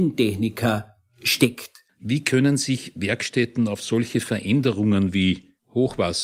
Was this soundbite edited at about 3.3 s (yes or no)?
no